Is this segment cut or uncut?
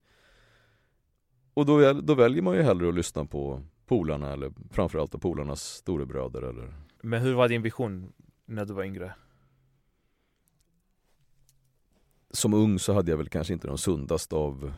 cut